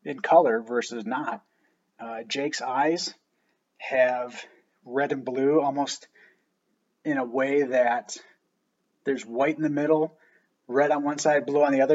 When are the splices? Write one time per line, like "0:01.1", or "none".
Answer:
0:01.9